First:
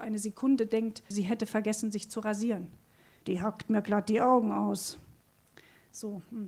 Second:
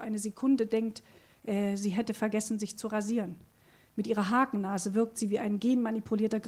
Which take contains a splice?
first; 2 cuts; at 1.1 s, 3.2 s

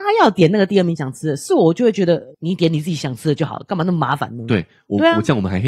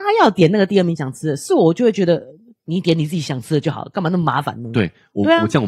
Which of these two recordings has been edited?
first; 1 cut; at 2.3 s

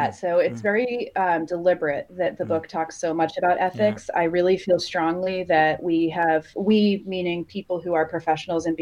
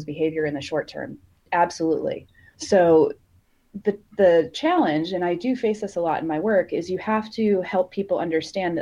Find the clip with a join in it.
second; 1 cut; at 2.5 s

